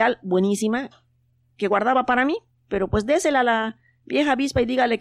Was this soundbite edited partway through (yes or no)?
no